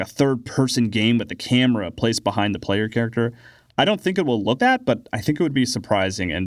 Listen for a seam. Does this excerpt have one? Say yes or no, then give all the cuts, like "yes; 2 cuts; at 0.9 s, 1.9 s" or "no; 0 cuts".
yes; 1 cut; at 4.6 s